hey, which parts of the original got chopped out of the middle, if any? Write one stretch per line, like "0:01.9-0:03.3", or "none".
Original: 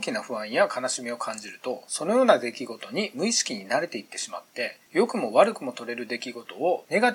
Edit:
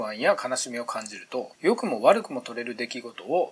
0:01.9-0:04.8